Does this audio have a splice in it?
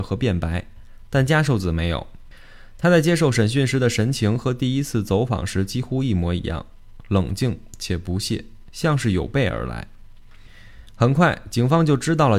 no; 0 cuts

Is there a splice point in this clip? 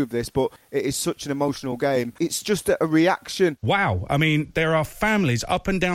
no; 0 cuts

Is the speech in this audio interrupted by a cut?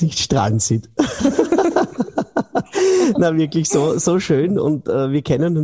no; 0 cuts

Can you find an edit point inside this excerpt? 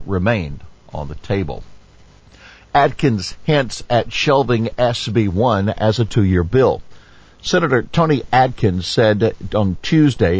no; 0 cuts

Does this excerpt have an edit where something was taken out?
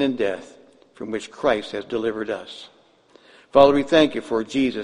no; 0 cuts

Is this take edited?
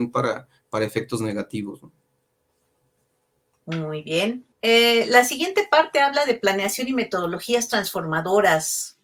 yes; 1 cut; at 4.5 s

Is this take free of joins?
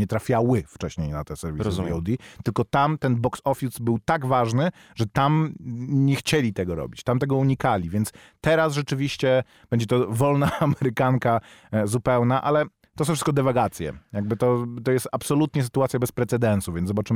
yes; 0 cuts

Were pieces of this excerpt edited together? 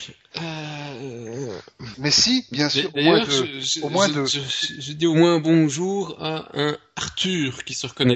yes; 1 cut; at 1.9 s

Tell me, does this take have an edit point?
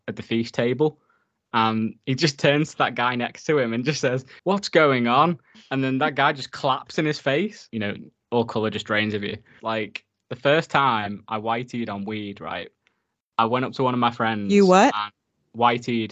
yes; 3 cuts; at 4.4 s, 7.7 s, 9.6 s

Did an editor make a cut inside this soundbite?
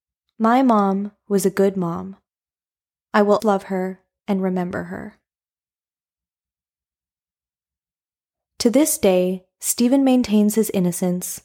yes; 1 cut; at 3.4 s

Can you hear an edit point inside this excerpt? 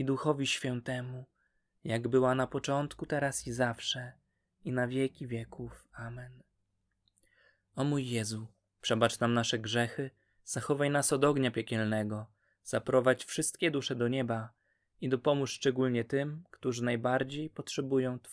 no; 0 cuts

